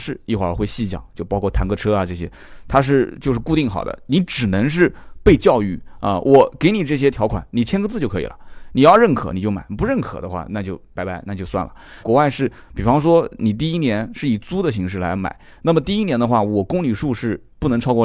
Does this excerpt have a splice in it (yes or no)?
yes